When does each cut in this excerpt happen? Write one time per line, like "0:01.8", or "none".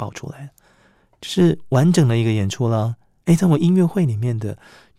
0:03.2